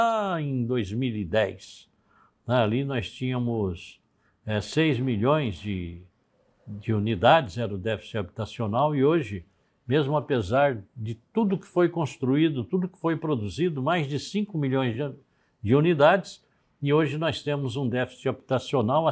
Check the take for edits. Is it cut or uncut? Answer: uncut